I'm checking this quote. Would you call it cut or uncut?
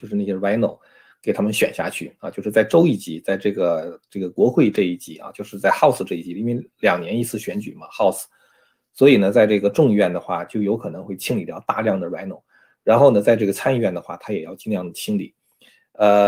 uncut